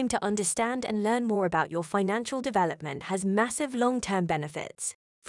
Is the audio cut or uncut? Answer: uncut